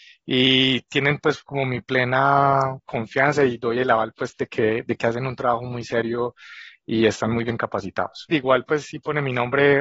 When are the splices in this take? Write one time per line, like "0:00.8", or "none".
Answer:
0:08.3